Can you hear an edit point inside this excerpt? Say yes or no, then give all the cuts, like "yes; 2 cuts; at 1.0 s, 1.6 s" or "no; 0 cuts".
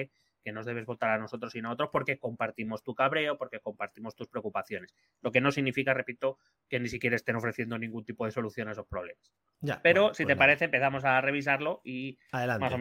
no; 0 cuts